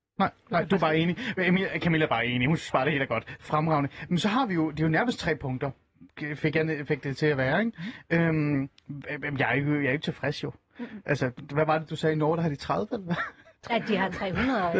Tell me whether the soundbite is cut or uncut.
uncut